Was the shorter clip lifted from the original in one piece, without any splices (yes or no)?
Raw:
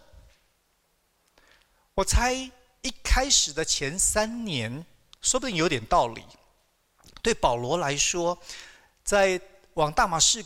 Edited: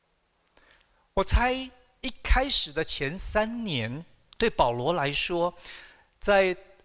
no